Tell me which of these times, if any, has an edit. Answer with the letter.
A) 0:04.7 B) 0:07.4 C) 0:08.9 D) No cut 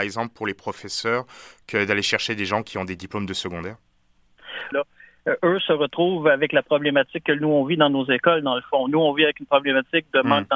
A